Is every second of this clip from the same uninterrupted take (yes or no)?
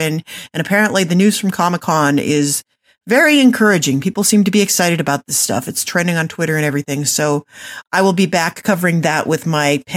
yes